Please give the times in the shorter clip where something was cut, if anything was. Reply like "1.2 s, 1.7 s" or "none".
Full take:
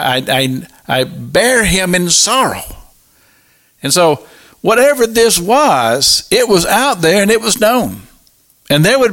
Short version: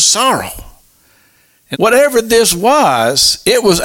1.7 s